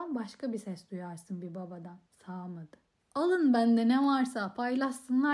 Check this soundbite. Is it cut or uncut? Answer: cut